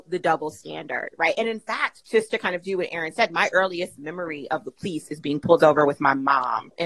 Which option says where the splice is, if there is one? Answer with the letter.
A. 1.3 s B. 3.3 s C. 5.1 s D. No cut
D